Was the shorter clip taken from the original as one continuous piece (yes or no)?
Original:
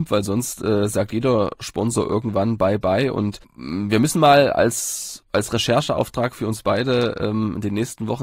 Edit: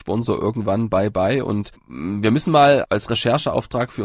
no